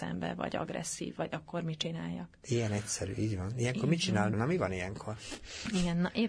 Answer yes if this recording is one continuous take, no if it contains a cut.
no